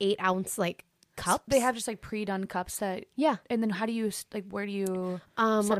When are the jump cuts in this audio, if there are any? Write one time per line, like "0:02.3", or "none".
none